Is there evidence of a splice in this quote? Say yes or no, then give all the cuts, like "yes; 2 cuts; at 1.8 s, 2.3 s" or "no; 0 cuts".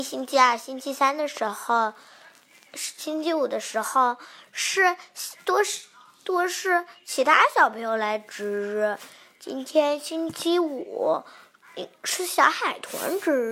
no; 0 cuts